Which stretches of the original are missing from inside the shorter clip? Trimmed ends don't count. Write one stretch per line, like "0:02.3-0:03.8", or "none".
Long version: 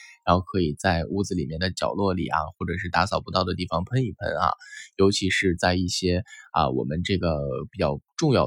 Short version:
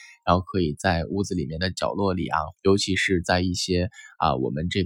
0:02.6-0:04.9